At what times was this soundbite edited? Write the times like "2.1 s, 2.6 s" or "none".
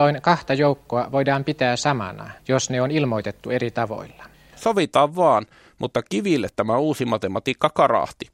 2.4 s, 4.5 s